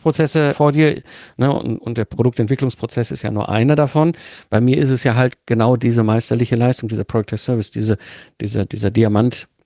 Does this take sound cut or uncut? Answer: uncut